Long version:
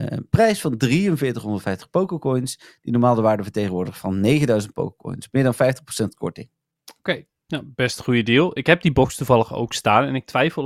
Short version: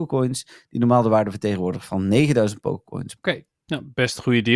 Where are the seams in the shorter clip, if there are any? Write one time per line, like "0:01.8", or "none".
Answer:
0:03.2